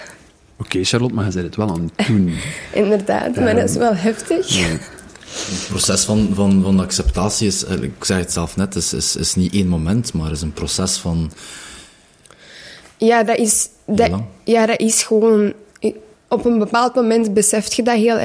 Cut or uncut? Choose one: uncut